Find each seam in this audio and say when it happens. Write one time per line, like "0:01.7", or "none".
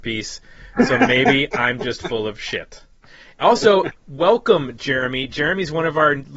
0:04.0